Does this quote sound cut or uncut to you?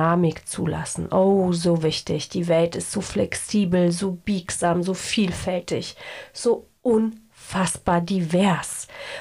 uncut